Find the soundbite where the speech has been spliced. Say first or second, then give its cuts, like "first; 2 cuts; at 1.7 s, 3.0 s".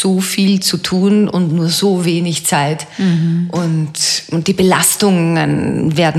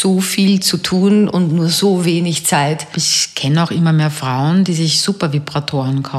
second; 1 cut; at 2.9 s